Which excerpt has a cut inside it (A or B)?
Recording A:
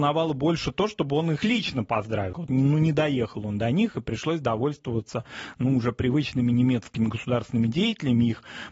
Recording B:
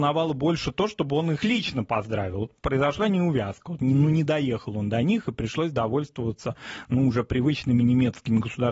A